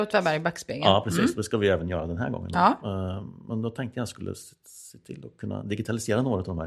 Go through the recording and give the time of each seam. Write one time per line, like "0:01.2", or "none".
none